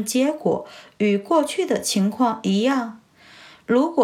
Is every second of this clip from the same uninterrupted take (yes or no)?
yes